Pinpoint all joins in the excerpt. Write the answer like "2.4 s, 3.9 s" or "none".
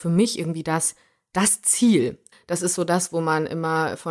2.3 s